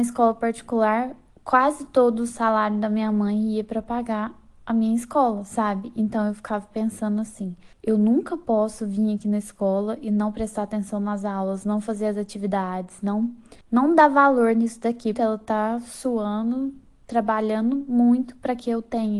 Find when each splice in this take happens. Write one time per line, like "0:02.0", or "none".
0:07.7
0:13.6
0:15.1